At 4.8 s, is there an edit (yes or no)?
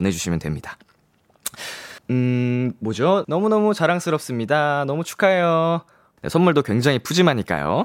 no